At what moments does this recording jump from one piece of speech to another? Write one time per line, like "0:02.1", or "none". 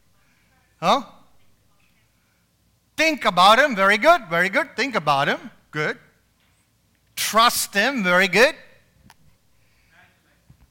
none